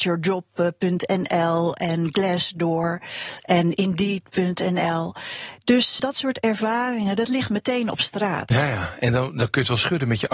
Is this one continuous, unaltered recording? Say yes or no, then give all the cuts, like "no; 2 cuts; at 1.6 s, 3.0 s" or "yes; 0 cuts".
no; 1 cut; at 6.0 s